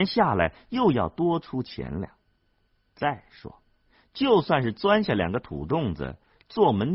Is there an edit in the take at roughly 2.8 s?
no; 0 cuts

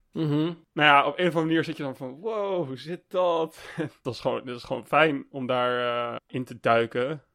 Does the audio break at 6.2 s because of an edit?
yes; 1 cut; at 6.2 s

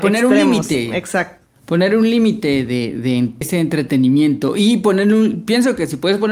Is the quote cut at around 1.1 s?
no; 1 cut; at 3.4 s

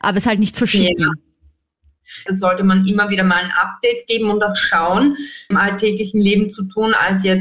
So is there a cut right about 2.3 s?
yes; 2 cuts; at 2.3 s, 5.5 s

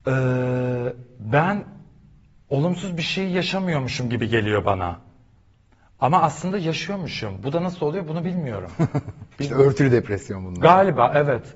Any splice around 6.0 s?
no; 1 cut; at 9.3 s

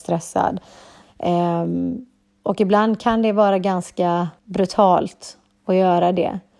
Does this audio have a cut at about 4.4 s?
yes; 2 cuts; at 1.0 s, 4.4 s

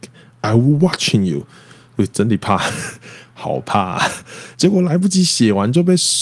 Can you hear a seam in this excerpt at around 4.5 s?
yes; 1 cut; at 4.5 s

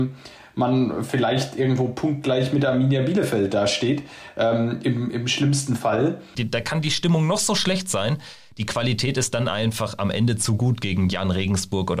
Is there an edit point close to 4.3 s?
no; 1 cut; at 6.3 s

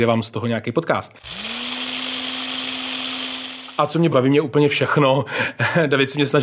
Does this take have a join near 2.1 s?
no; 1 cut; at 4.1 s

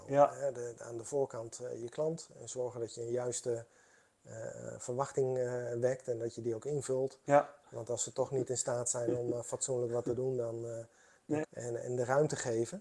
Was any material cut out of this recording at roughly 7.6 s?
yes; 2 cuts; at 7.6 s, 11.4 s

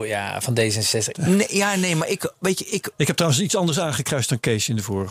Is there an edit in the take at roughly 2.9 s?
no; 1 cut; at 1.1 s

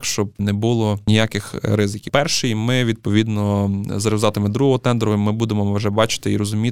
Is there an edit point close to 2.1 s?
yes; 1 cut; at 2.1 s

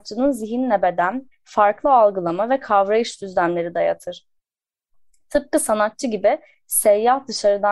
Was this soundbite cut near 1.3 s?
yes; 1 cut; at 1.3 s

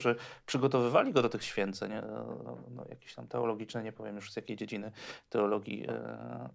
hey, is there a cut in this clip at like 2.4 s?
yes; 1 cut; at 2.4 s

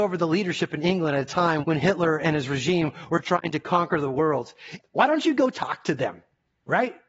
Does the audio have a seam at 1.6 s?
yes; 2 cuts; at 1.6 s, 4.8 s

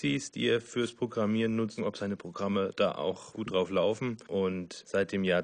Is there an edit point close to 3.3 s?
yes; 2 cuts; at 1.8 s, 3.3 s

